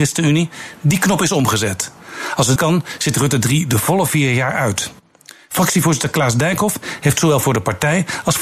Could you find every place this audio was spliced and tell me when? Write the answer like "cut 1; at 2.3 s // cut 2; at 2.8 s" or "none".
cut 1; at 2.6 s